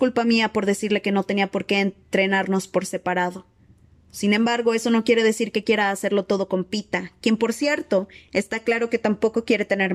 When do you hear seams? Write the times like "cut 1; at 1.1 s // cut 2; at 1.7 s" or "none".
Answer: none